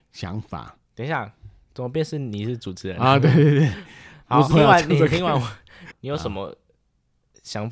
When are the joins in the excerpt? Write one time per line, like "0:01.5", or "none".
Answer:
0:04.5
0:05.9